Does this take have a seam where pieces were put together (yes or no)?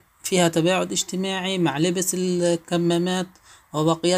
no